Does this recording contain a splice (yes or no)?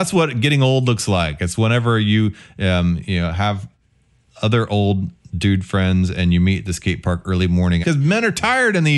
yes